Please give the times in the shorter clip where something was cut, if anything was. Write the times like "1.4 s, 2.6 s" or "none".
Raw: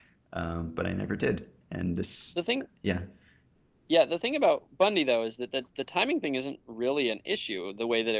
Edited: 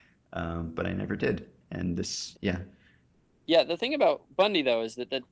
2.3 s